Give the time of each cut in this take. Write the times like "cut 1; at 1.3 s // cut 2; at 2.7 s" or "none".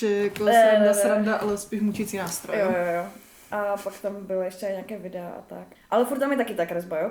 cut 1; at 5.7 s